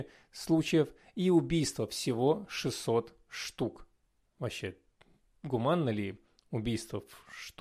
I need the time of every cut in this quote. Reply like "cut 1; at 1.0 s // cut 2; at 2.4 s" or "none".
none